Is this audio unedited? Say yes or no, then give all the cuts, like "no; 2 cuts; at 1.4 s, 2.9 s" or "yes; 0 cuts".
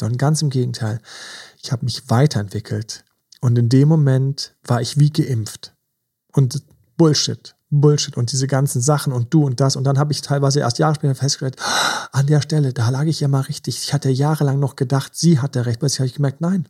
yes; 0 cuts